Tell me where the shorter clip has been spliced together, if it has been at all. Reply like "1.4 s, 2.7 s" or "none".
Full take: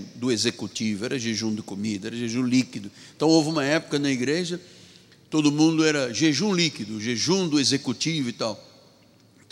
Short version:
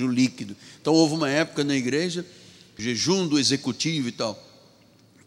2.8 s